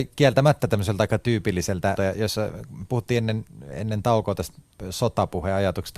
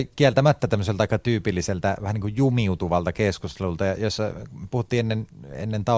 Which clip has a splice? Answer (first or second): first